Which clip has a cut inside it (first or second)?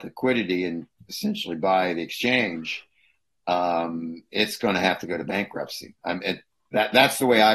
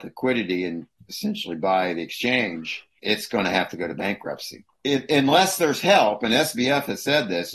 second